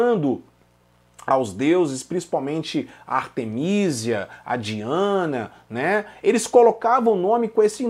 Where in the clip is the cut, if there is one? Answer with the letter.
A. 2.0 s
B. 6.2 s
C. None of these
B